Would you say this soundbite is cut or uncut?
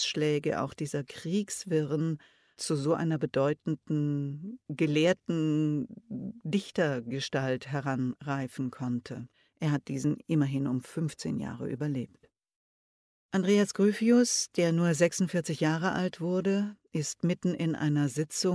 cut